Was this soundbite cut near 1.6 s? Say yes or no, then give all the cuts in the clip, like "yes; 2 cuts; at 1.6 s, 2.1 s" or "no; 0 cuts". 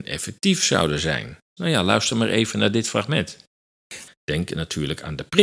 yes; 2 cuts; at 1.6 s, 4.1 s